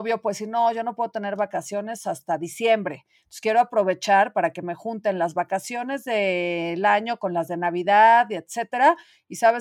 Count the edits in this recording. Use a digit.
0